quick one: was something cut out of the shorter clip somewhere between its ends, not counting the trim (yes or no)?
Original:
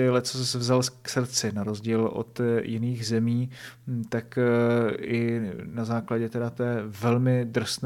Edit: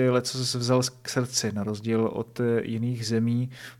no